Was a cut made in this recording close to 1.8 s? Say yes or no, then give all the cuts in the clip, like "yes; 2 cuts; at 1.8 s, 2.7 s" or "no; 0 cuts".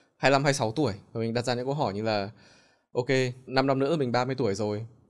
no; 1 cut; at 3.5 s